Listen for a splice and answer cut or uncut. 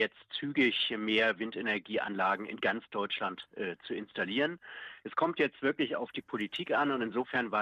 uncut